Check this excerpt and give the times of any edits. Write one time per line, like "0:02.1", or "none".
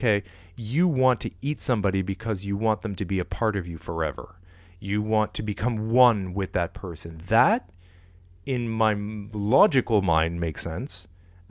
none